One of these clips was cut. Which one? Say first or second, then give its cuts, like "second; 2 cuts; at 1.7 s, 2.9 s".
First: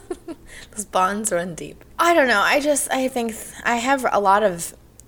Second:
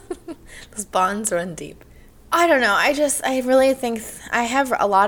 first; 2 cuts; at 1.9 s, 3.1 s